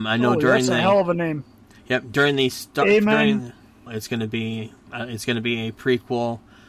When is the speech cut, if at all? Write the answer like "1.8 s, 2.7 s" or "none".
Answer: 3.9 s